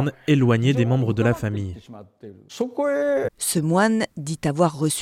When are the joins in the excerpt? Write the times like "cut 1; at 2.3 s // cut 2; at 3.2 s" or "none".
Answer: cut 1; at 3.3 s